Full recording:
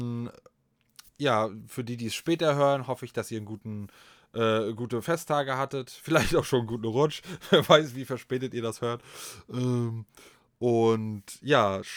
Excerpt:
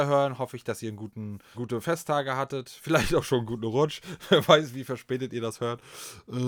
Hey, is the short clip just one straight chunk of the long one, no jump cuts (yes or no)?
no